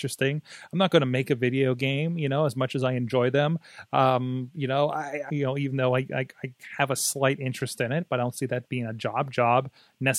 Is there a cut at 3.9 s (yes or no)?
no